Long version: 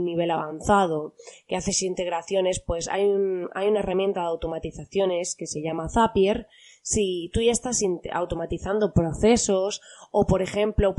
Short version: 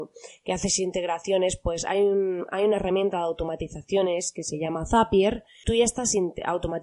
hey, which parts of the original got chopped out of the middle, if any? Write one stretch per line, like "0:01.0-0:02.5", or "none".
0:06.7-0:07.3